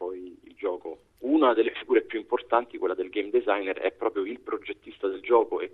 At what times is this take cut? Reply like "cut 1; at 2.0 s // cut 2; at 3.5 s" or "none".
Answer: cut 1; at 1.2 s